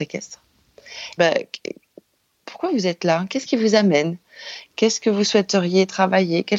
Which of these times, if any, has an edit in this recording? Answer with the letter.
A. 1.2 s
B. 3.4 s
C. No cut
A